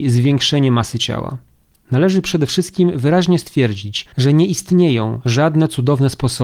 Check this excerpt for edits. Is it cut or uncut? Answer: cut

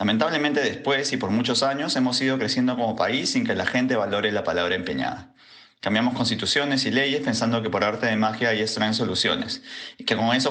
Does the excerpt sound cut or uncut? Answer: uncut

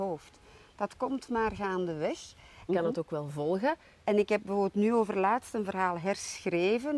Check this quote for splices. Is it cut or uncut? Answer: cut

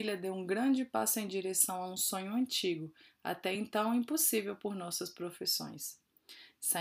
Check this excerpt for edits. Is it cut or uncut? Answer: uncut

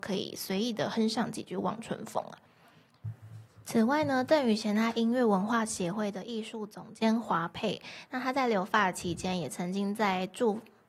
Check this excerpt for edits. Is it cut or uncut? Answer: uncut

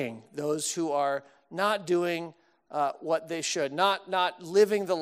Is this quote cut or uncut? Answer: uncut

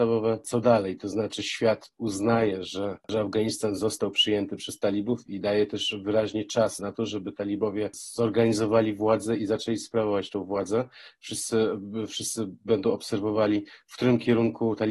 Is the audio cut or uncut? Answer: cut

